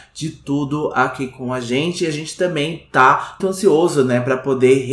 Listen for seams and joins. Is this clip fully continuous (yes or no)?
no